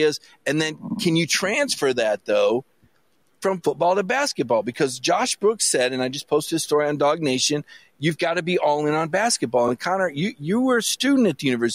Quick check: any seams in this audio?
no; 0 cuts

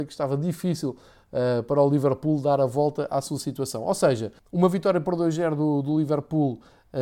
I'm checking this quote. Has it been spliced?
yes; 1 cut; at 4.4 s

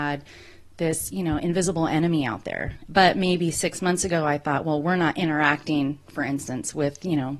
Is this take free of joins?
no; 1 cut; at 2.9 s

